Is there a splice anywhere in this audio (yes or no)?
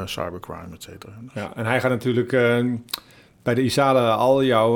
no